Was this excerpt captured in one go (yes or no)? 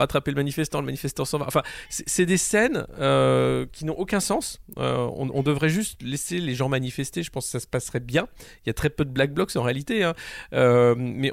yes